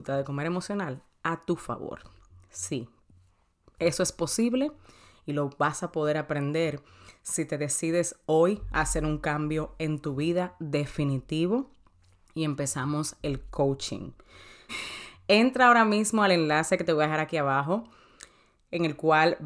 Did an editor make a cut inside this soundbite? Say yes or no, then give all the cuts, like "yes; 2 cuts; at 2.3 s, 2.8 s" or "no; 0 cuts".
yes; 1 cut; at 14.7 s